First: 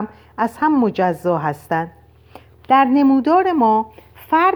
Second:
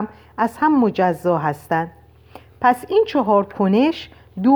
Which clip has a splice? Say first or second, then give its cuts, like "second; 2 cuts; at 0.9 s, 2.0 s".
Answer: first; 1 cut; at 2.5 s